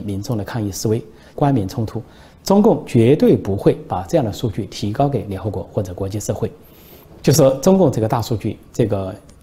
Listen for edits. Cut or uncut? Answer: cut